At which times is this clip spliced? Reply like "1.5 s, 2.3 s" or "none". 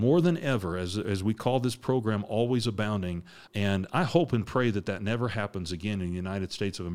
3.5 s